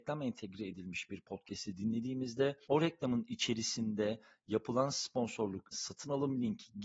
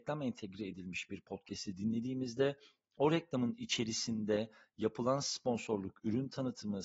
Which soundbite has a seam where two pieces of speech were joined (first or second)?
first